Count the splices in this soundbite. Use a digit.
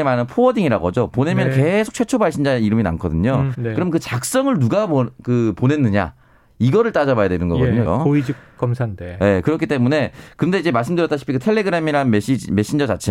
2